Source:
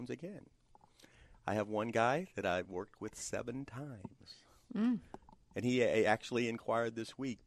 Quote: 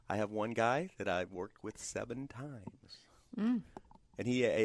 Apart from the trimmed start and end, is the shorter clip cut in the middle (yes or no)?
no